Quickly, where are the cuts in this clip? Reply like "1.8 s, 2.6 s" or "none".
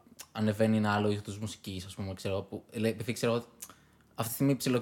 none